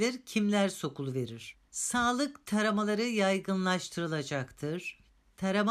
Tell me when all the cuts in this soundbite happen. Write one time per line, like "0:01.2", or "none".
0:01.7

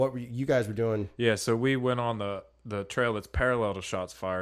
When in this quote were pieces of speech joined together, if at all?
none

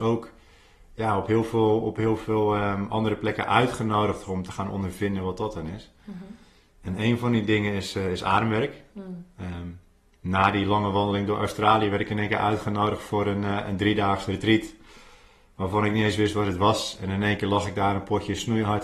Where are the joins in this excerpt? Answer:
none

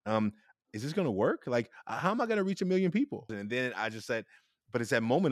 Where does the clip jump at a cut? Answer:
0:03.3

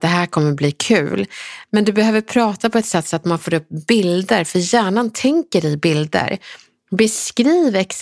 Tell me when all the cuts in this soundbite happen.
none

